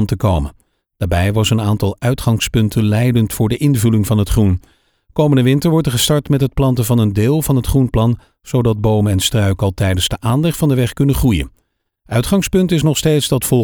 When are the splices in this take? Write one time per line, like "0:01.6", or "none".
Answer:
none